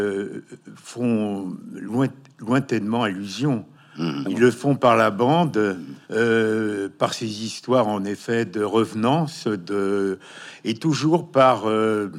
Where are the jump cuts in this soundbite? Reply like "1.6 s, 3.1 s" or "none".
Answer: 4.2 s, 6.0 s